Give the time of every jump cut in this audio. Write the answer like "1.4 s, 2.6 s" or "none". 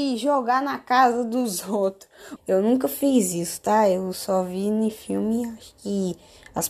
2.4 s